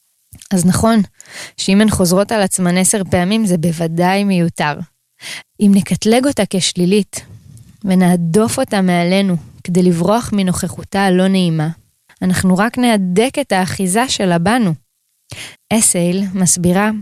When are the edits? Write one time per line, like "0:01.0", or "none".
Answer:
0:05.4
0:12.1
0:15.5